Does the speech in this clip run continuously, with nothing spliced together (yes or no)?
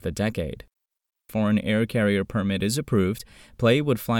no